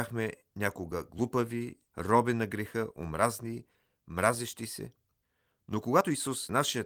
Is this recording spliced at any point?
yes; 1 cut; at 1.9 s

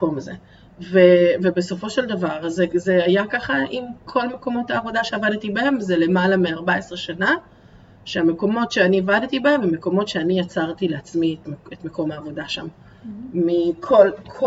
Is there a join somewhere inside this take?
no; 0 cuts

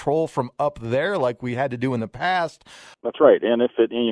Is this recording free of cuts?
no; 1 cut; at 2.9 s

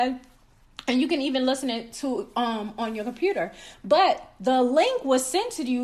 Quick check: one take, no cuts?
yes; 0 cuts

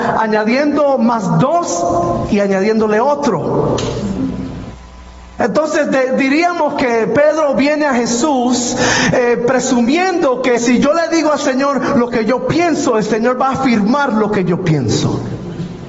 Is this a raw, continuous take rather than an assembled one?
no; 1 cut; at 10.6 s

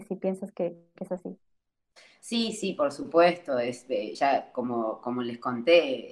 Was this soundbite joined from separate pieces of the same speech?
no; 0 cuts

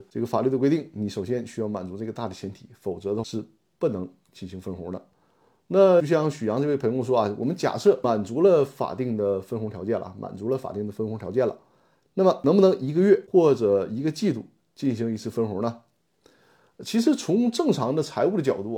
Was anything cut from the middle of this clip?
no; 0 cuts

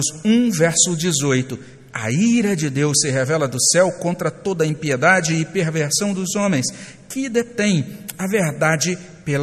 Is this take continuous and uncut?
yes; 0 cuts

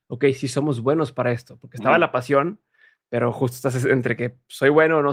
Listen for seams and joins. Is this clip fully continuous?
yes; 0 cuts

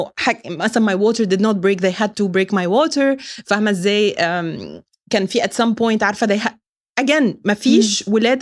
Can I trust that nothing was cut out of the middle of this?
yes; 0 cuts

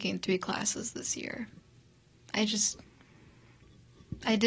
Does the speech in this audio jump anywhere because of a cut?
no; 0 cuts

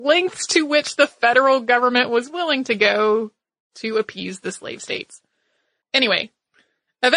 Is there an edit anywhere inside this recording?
yes; 1 cut; at 5.8 s

